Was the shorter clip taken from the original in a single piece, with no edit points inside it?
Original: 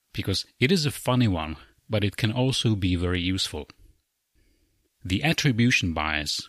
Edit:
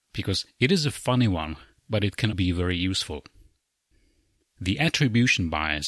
no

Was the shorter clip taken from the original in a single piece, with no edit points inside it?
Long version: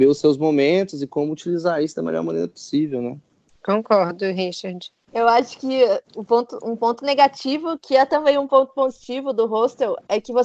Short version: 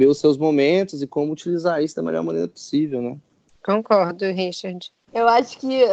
yes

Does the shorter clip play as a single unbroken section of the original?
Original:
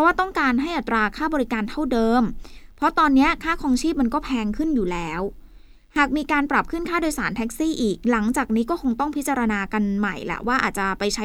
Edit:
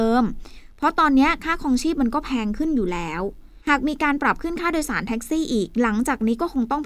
no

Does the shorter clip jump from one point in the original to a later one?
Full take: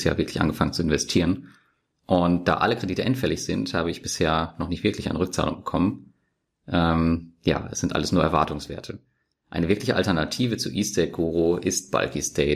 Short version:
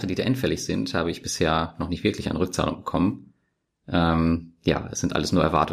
no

